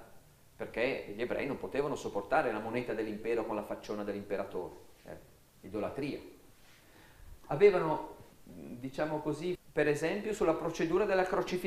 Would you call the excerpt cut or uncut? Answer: cut